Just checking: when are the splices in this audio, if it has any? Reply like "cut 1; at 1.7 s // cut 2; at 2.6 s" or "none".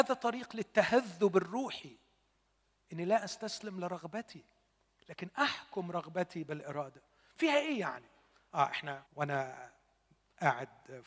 cut 1; at 9.1 s